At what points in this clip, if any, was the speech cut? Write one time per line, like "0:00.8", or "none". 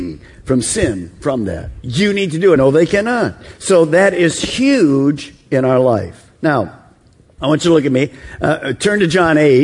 0:02.6